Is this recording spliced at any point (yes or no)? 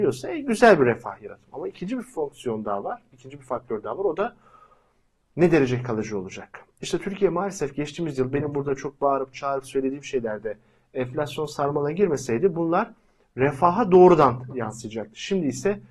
no